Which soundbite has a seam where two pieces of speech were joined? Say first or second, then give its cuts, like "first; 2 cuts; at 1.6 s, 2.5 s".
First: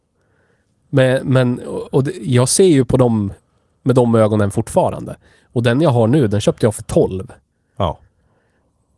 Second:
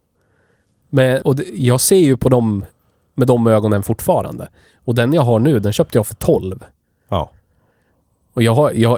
second; 1 cut; at 1.2 s